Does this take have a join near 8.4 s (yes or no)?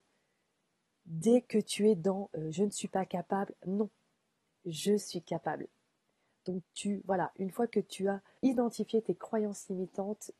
yes